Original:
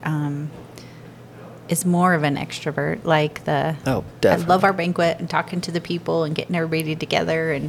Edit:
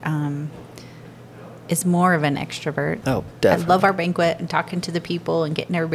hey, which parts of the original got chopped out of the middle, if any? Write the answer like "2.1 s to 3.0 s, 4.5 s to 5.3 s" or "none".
3.0 s to 3.8 s

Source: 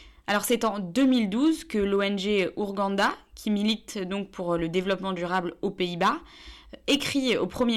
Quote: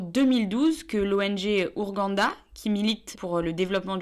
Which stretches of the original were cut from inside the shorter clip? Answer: 3.9 s to 4.3 s

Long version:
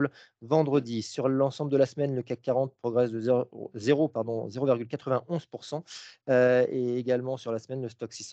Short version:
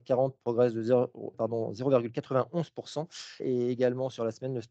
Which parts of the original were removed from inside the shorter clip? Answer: 3.7 s to 4.1 s, 6.2 s to 6.7 s

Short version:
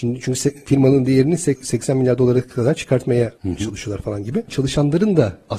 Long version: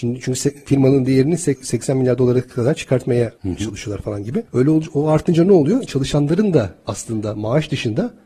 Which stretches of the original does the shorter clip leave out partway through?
4.5 s to 5.8 s

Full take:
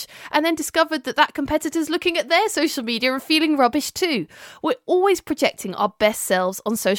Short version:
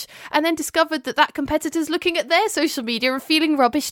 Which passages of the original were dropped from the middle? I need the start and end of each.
none

